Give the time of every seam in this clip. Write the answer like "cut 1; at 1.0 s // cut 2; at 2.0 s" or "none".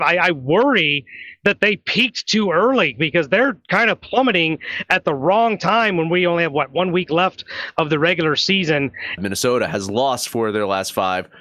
cut 1; at 9.2 s